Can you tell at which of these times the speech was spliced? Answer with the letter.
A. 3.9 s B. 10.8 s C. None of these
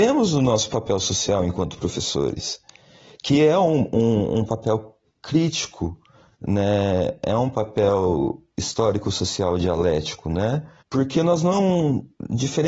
B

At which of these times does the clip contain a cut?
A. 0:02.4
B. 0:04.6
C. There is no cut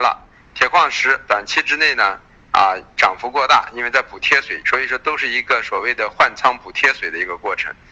B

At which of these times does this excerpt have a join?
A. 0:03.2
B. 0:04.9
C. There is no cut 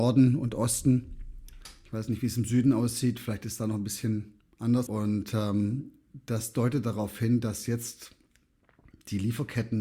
B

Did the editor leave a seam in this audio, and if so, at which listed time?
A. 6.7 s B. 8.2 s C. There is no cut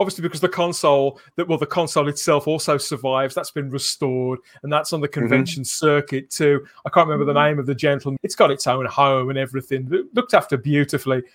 B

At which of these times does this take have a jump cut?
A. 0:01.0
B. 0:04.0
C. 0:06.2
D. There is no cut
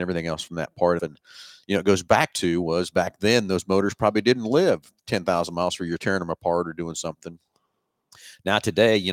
A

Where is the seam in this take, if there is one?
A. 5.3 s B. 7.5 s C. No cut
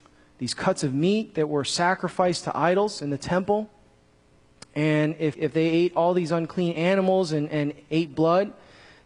A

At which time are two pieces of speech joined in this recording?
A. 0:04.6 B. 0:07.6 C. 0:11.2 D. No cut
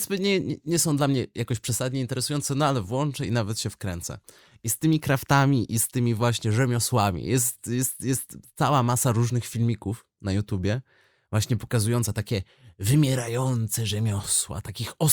D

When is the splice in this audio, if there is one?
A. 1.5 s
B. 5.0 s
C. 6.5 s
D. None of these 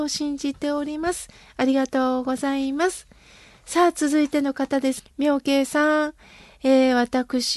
B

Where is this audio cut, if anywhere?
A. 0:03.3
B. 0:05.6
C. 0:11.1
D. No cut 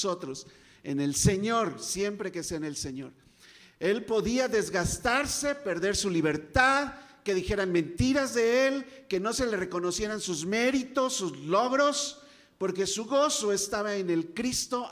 D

